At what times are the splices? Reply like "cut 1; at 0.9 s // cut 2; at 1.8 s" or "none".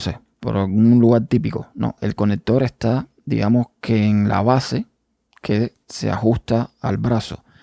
cut 1; at 2.0 s